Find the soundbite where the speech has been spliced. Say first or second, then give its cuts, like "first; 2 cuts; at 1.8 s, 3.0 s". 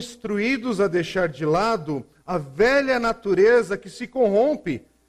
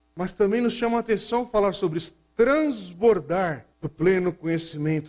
second; 1 cut; at 3.7 s